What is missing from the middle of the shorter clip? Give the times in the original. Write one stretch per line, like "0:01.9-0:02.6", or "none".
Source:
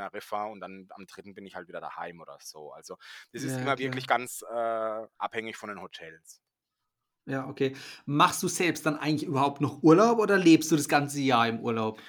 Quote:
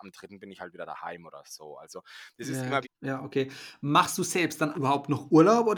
0:03.8-0:07.1
0:09.0-0:09.3